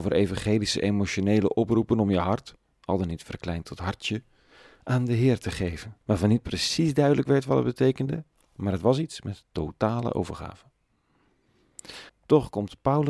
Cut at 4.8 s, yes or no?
no